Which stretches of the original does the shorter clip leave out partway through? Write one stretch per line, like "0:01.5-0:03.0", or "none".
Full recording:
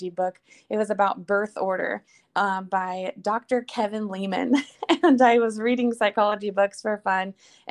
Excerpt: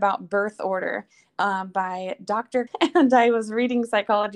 0:03.6-0:04.7